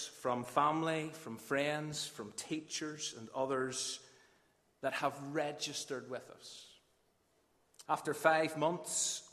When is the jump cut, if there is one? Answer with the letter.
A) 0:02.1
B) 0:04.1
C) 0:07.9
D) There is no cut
C